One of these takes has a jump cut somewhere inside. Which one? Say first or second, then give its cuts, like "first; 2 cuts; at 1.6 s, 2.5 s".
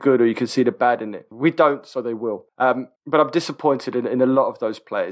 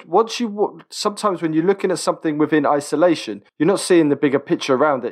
first; 1 cut; at 1.3 s